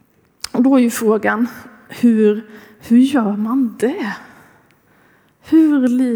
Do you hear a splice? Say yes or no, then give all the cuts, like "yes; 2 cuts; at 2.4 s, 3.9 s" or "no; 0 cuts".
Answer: no; 0 cuts